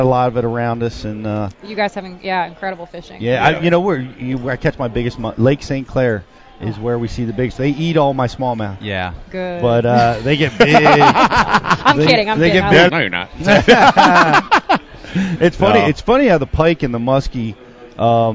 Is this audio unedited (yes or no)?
no